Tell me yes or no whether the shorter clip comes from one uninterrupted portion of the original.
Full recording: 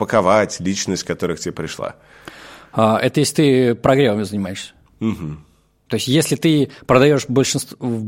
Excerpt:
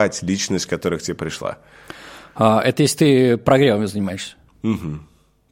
yes